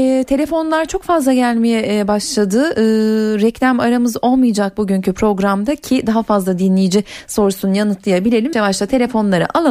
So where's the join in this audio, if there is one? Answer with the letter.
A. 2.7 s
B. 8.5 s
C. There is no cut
B